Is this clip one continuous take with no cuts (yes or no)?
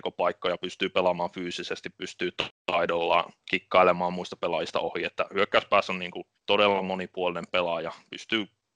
no